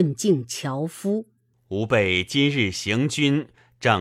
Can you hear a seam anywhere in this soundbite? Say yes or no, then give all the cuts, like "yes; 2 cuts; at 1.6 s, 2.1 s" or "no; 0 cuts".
yes; 1 cut; at 1.5 s